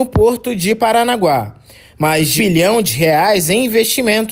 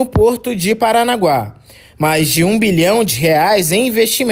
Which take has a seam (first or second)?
first